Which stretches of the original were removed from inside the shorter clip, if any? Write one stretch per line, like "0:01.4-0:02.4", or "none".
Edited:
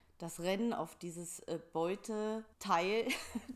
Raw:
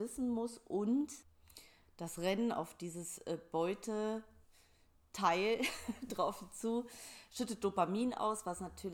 0:04.3-0:05.1